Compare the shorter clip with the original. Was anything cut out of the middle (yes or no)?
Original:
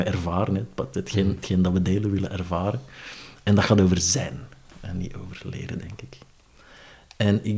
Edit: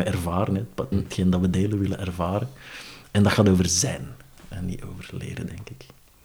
yes